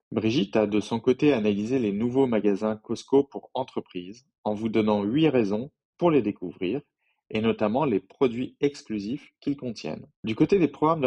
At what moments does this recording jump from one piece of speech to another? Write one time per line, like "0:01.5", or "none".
0:10.2